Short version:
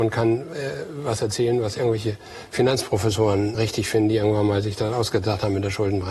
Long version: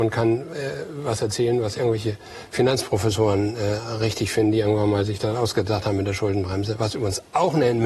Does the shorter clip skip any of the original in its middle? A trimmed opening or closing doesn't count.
yes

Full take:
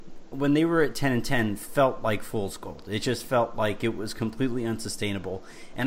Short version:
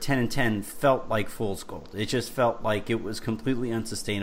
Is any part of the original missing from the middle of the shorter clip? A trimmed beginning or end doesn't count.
no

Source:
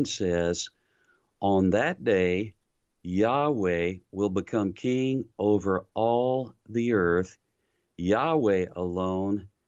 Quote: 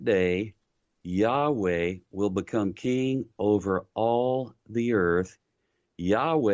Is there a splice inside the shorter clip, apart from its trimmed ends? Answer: no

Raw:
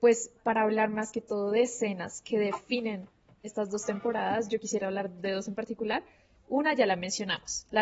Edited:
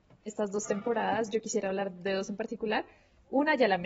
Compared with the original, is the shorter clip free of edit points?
yes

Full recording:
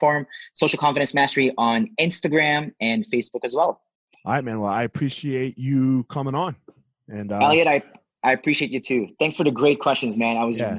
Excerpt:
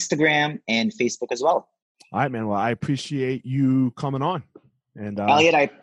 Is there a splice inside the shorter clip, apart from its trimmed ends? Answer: no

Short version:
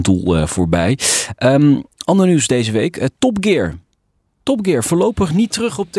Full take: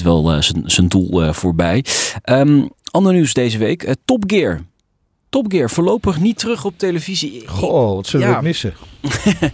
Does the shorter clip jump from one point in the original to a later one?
no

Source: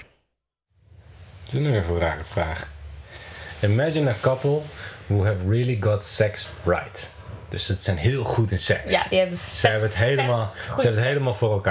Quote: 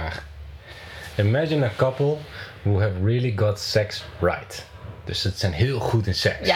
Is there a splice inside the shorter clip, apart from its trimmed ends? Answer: no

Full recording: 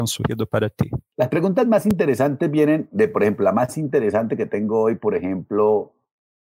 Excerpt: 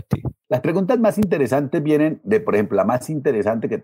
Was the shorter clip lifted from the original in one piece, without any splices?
yes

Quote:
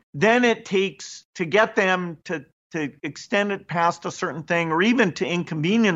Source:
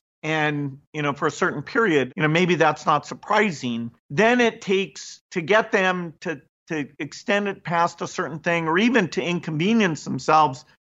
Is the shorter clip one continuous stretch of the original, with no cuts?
yes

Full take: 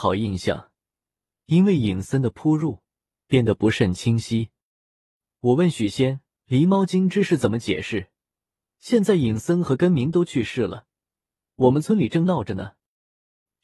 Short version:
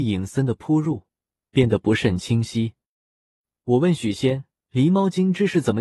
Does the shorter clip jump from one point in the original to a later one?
no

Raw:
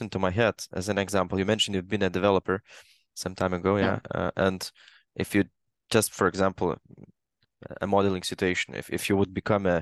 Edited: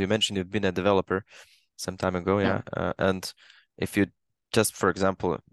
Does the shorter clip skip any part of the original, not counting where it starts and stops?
no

